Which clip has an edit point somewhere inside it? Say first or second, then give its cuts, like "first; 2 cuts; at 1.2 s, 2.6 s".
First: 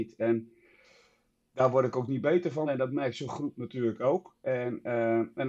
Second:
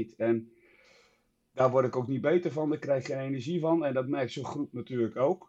first; 1 cut; at 2.7 s